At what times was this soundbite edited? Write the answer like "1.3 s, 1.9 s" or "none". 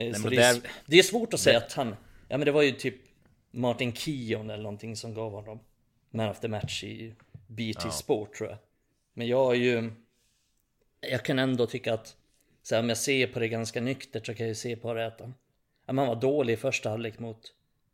11.0 s